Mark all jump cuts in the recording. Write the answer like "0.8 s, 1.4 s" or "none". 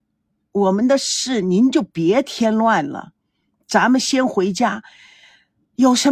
none